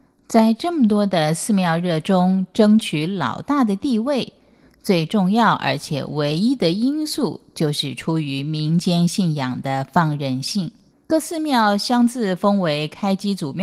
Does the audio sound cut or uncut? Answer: cut